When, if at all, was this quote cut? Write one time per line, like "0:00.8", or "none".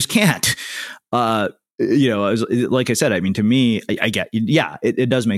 none